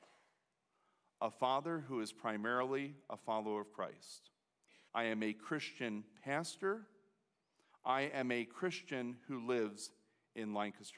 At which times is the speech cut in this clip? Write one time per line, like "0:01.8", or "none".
0:04.9
0:07.7